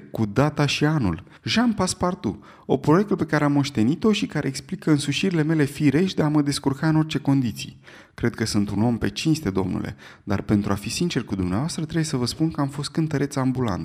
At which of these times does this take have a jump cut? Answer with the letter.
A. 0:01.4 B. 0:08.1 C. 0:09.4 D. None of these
A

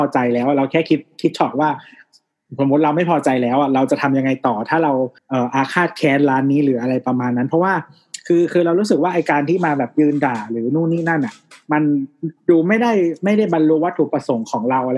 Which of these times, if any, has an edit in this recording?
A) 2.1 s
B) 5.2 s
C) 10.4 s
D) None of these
B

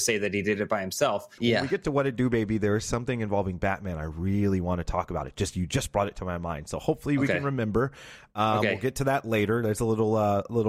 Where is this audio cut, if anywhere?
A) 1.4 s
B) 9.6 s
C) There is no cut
A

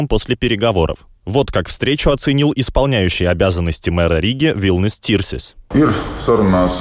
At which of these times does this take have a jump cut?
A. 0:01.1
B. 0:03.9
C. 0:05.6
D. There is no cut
D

